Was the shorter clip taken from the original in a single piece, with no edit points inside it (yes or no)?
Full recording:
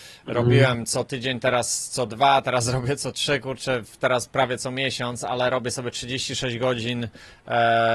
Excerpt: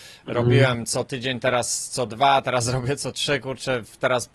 yes